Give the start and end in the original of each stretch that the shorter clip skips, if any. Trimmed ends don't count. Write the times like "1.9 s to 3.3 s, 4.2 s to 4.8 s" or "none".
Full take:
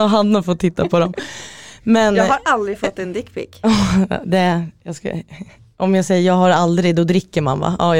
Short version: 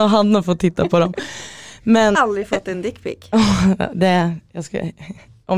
2.1 s to 2.5 s